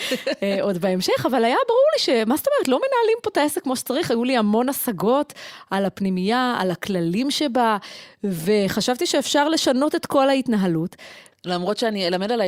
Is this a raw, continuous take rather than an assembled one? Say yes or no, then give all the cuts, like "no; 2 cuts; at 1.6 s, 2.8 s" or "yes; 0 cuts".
no; 1 cut; at 11.3 s